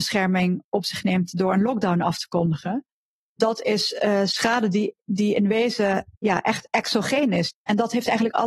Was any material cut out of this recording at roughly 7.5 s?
yes; 2 cuts; at 6.1 s, 7.5 s

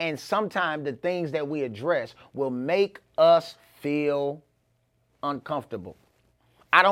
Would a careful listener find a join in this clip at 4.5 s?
no; 0 cuts

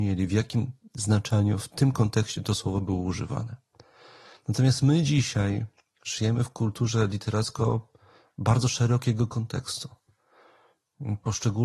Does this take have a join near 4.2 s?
no; 0 cuts

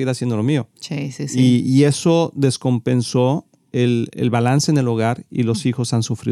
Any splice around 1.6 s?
no; 1 cut; at 4.1 s

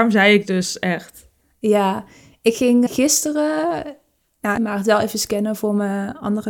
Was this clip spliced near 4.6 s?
yes; 2 cuts; at 2.9 s, 4.6 s

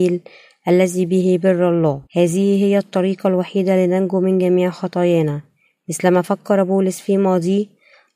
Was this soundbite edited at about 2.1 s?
yes; 1 cut; at 2.1 s

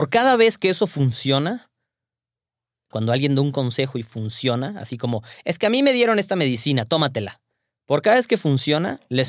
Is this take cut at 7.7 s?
no; 1 cut; at 2.9 s

